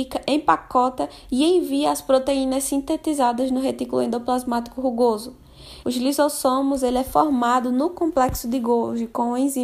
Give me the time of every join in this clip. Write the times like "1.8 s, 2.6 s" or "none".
5.8 s